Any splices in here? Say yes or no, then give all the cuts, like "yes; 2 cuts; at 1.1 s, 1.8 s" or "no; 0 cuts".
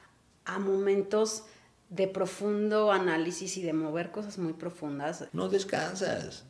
yes; 1 cut; at 5.3 s